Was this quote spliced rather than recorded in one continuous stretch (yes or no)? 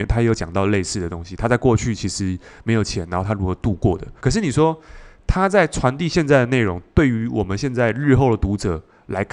yes